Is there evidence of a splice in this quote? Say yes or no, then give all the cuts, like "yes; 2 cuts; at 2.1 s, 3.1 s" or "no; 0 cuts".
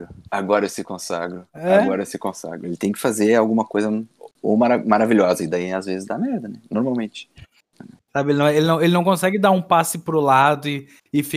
yes; 1 cut; at 8.1 s